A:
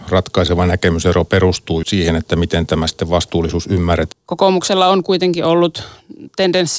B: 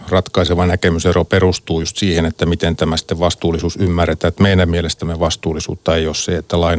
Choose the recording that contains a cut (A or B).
A